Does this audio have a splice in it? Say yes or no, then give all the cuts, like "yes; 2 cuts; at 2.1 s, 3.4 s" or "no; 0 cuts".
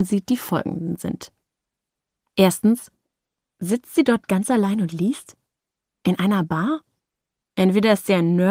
no; 0 cuts